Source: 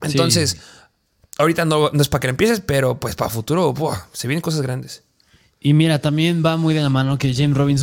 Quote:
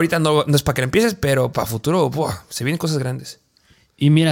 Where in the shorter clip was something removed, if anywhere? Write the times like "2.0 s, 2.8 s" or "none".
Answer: 1.5 s